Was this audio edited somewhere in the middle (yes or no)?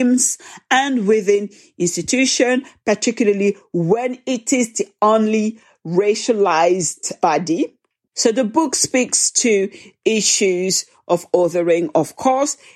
yes